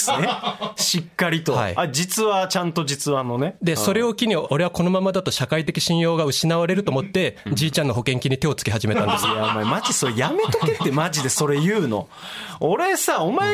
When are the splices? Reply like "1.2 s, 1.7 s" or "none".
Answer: none